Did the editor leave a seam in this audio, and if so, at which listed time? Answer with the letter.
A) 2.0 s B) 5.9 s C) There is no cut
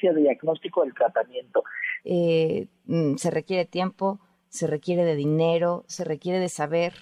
A